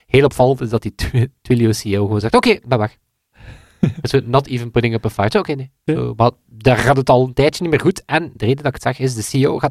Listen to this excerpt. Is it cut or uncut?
cut